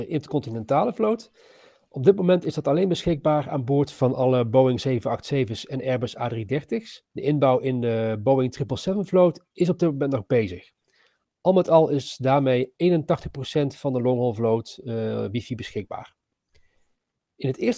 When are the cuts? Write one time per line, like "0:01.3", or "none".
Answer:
0:07.1